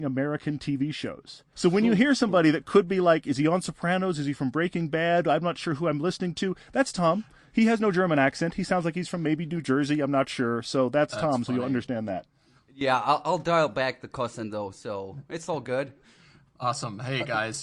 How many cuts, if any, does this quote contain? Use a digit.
1